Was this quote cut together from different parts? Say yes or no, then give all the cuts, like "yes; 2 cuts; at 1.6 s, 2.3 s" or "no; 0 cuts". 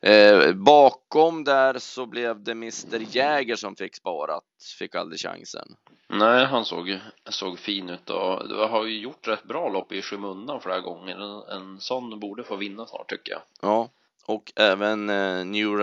no; 0 cuts